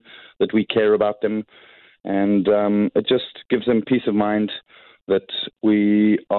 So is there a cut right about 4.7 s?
no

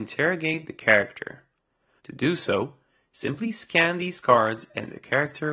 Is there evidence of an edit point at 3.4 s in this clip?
no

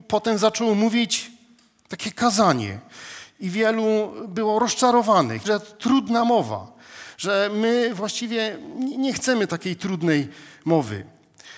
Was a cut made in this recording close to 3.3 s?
yes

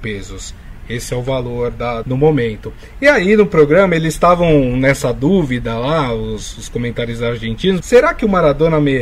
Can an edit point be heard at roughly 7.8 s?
yes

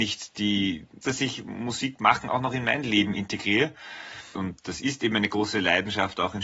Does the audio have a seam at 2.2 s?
no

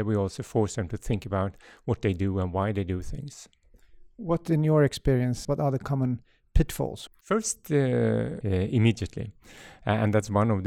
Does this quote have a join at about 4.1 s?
no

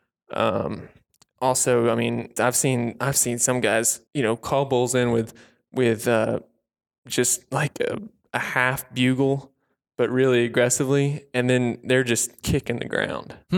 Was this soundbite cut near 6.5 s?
no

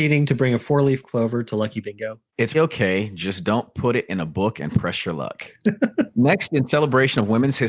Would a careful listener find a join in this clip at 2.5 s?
yes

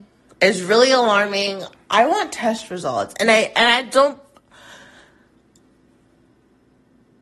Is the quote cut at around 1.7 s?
yes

